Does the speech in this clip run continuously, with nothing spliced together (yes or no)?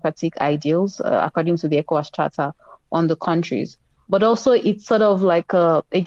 yes